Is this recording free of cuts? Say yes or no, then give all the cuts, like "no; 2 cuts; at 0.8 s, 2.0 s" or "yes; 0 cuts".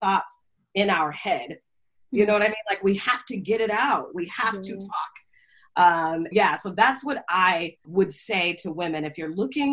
no; 2 cuts; at 6.3 s, 7.8 s